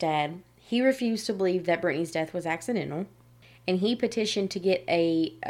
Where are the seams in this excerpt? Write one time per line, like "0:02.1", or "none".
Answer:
none